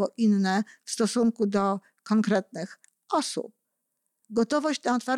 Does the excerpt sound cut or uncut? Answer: cut